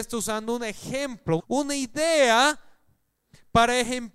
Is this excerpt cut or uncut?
cut